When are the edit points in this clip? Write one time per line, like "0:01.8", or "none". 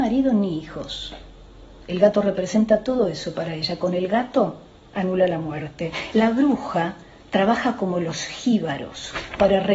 none